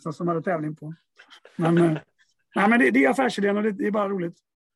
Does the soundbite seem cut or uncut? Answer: uncut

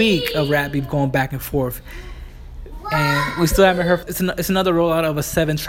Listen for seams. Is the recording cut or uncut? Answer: cut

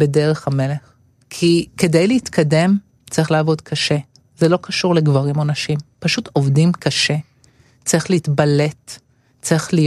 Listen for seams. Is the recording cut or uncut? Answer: uncut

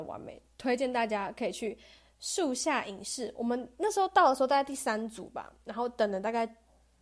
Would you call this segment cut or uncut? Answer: uncut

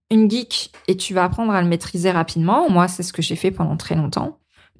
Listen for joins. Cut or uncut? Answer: uncut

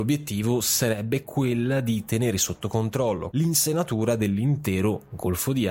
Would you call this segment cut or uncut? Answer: cut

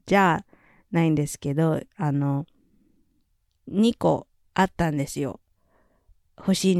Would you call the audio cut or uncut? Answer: uncut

